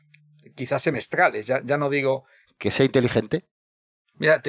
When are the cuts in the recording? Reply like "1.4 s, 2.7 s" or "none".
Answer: 2.4 s